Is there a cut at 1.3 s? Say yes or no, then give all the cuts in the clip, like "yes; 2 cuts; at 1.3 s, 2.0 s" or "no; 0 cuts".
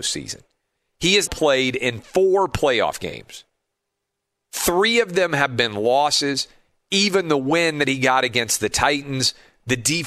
yes; 1 cut; at 1.3 s